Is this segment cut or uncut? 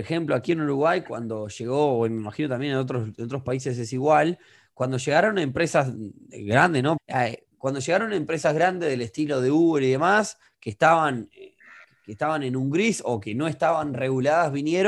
cut